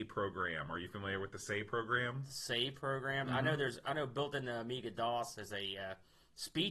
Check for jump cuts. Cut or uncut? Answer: uncut